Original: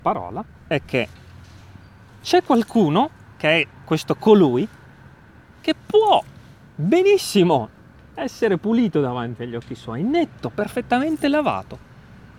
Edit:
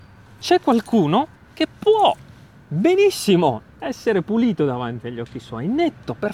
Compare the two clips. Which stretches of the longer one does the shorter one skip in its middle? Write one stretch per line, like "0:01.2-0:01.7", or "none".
0:03.2-0:05.4
0:07.8-0:08.0